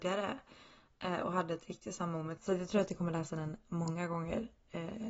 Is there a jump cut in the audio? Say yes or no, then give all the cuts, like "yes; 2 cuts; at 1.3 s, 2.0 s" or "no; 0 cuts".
yes; 1 cut; at 2.4 s